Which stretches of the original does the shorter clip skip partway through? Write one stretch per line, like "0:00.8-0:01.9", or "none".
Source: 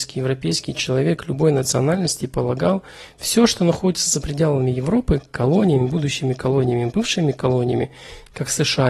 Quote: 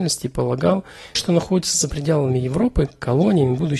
0:03.1-0:03.5